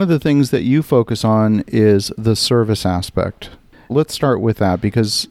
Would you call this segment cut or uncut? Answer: cut